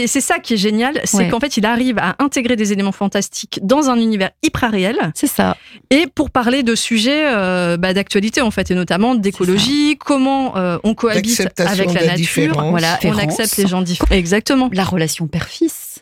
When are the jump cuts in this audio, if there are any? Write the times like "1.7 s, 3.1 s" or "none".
13.0 s, 14.0 s